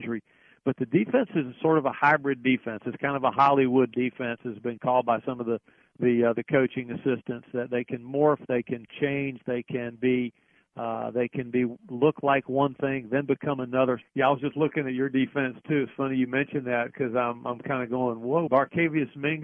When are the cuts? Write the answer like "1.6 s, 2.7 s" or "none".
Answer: 14.0 s, 18.5 s